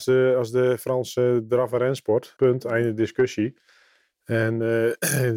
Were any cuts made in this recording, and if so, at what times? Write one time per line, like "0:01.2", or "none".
0:02.4

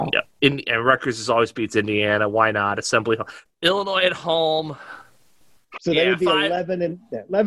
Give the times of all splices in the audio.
0:03.5
0:05.8

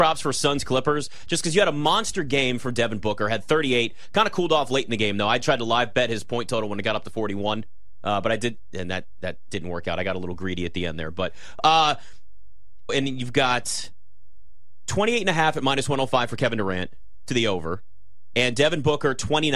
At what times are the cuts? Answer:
0:12.9

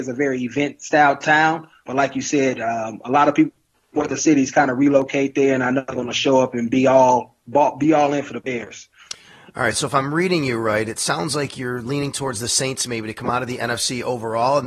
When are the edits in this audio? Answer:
none

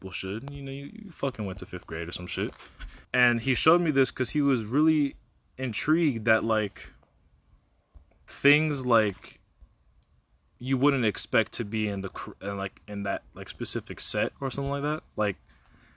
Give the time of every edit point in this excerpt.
0:03.0

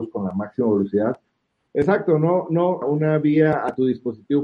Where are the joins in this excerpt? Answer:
0:01.7
0:02.8

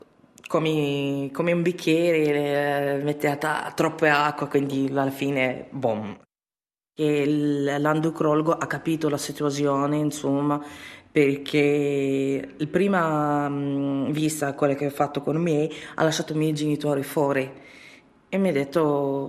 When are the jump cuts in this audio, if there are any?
none

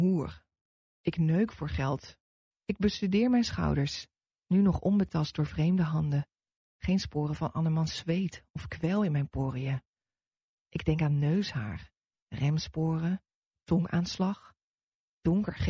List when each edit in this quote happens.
0:02.5

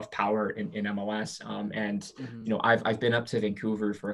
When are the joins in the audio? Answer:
none

